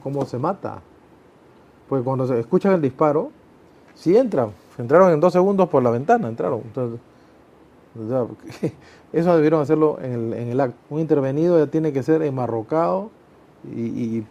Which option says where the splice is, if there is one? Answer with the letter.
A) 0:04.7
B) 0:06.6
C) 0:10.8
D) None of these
C